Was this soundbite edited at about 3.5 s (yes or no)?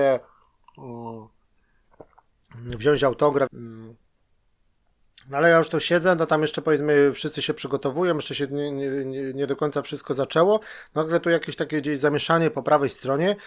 yes